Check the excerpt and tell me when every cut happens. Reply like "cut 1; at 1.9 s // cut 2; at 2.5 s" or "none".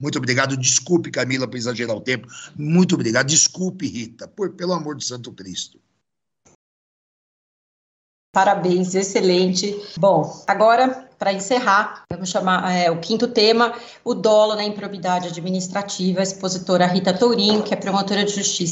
none